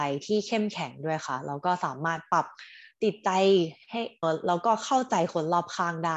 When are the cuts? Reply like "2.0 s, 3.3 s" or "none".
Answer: 4.2 s